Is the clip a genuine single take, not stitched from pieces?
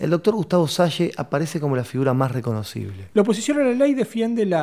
no; 1 cut; at 3.1 s

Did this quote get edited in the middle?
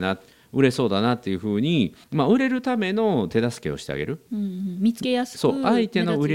yes; 1 cut; at 2.0 s

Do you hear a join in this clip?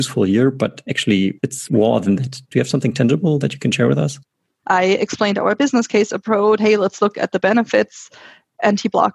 yes; 2 cuts; at 4.6 s, 6.6 s

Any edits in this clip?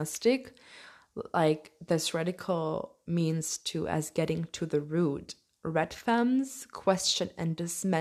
no; 0 cuts

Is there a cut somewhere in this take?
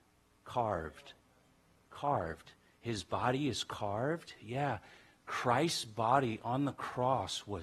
no; 0 cuts

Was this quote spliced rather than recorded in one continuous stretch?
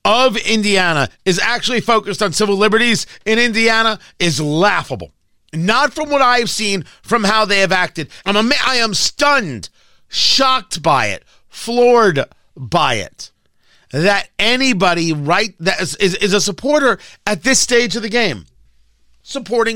yes; 1 cut; at 8.2 s

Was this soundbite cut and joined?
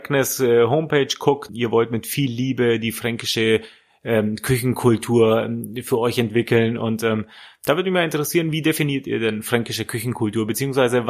yes; 1 cut; at 1.5 s

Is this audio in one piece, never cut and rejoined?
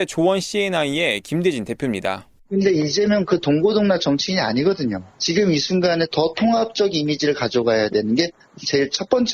yes; 0 cuts

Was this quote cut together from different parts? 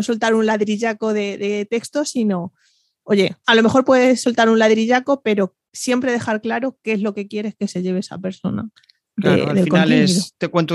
yes; 1 cut; at 3.4 s

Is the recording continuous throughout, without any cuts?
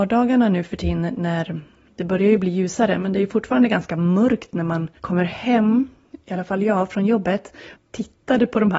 no; 2 cuts; at 5.0 s, 7.7 s

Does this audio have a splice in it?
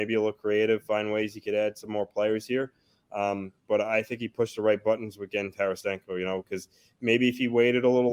no; 0 cuts

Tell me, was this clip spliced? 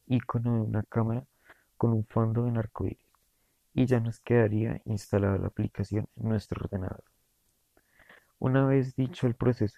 no; 0 cuts

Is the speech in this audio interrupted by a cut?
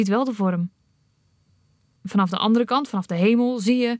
no; 0 cuts

